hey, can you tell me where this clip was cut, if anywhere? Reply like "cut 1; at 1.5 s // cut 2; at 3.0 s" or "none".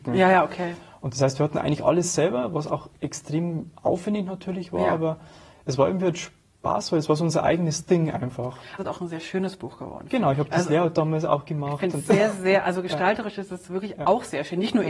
cut 1; at 8.8 s